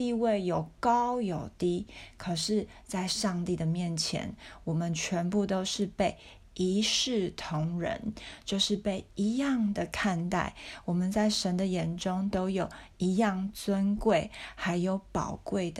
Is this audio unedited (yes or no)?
yes